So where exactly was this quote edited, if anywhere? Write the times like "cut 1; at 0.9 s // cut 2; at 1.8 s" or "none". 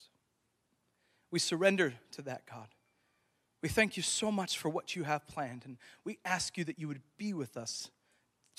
none

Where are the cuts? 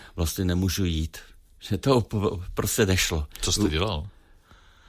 none

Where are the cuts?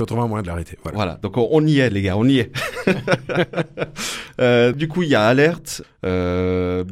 cut 1; at 4.7 s // cut 2; at 5.8 s

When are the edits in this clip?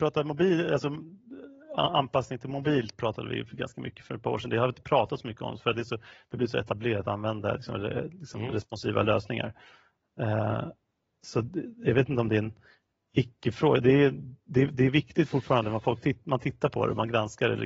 none

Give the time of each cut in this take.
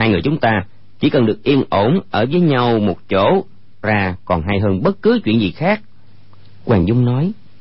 cut 1; at 3.8 s

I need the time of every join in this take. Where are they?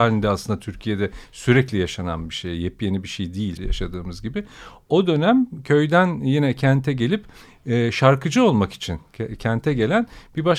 cut 1; at 3.6 s

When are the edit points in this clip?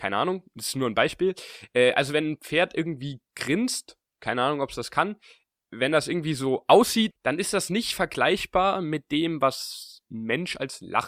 cut 1; at 7.1 s

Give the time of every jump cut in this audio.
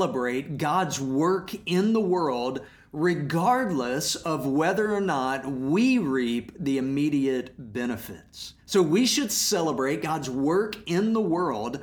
cut 1; at 8.6 s

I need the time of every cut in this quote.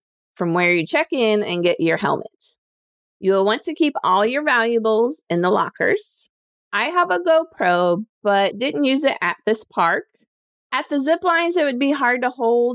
none

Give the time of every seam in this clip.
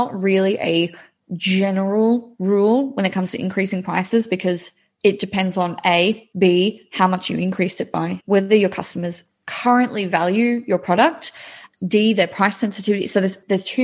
cut 1; at 6.3 s // cut 2; at 8.2 s

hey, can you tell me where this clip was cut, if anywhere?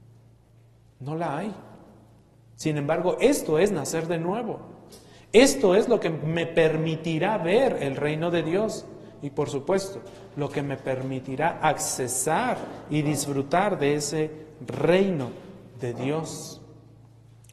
none

